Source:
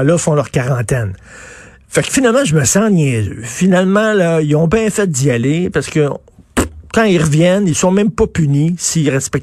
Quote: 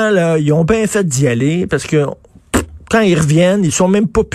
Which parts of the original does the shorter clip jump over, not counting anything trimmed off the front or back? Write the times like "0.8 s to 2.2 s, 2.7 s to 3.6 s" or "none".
none